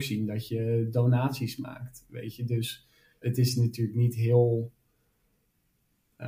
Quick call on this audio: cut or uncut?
cut